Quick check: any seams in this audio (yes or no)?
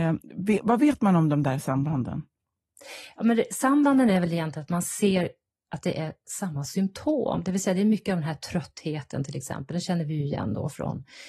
no